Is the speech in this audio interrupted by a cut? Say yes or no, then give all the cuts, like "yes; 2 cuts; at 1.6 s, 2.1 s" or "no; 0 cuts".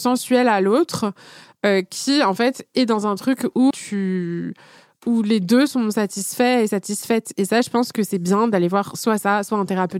yes; 1 cut; at 3.7 s